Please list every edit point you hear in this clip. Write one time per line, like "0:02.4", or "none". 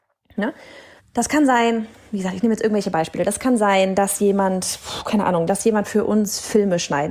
0:01.0
0:05.5